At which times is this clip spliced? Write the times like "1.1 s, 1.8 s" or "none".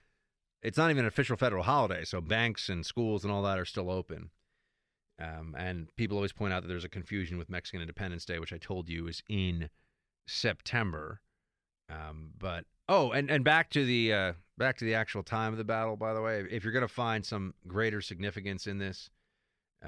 none